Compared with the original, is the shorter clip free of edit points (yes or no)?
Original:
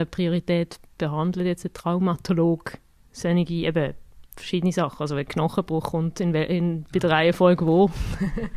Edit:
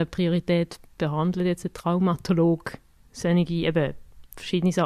yes